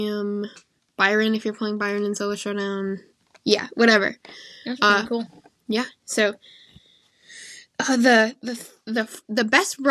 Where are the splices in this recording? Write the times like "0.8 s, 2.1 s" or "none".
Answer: none